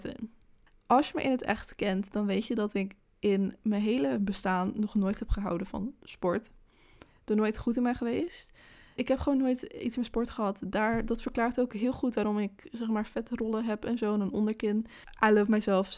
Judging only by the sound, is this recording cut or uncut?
cut